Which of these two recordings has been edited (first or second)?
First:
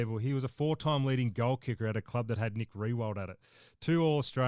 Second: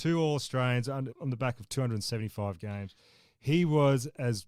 second